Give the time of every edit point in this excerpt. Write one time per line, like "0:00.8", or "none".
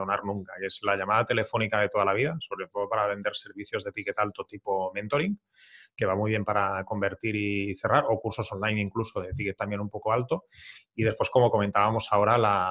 none